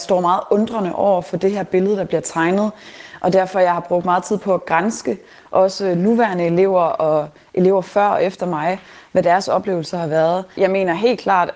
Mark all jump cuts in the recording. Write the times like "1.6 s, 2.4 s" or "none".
10.5 s